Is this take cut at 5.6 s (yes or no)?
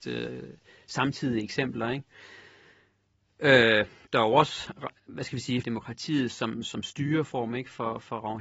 yes